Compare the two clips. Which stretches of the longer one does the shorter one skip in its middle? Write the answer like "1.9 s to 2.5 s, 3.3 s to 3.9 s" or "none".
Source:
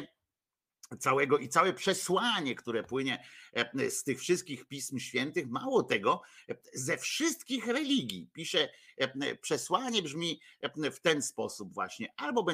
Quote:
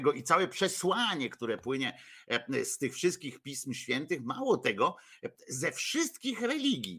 none